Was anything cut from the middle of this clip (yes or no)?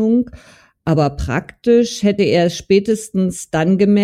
no